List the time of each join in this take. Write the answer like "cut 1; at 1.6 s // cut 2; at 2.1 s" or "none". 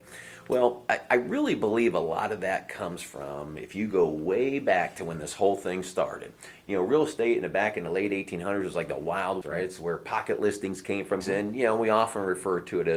cut 1; at 9.4 s // cut 2; at 11.2 s